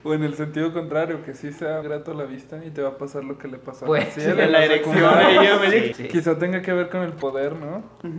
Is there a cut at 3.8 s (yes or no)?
no